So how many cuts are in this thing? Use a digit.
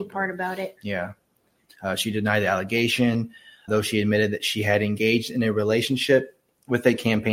2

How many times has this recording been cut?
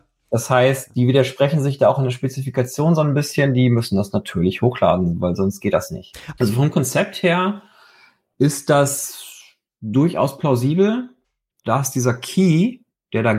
2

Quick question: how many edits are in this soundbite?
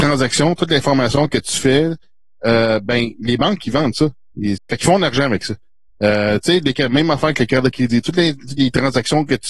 1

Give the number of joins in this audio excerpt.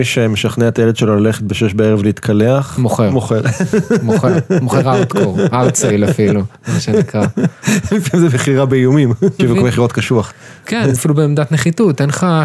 2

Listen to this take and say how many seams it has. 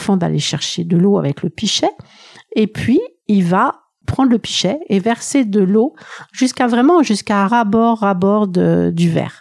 1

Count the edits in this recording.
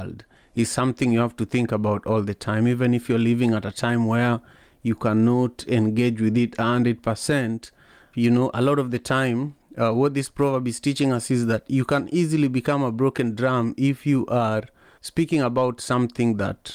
2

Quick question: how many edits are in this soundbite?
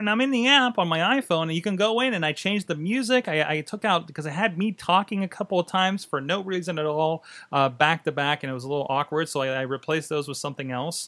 0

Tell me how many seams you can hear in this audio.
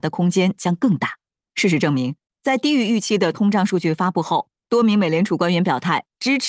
1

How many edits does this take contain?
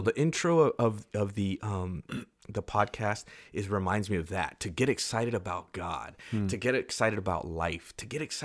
0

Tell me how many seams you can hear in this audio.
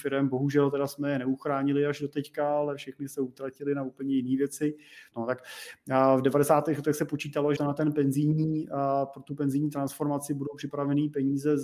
2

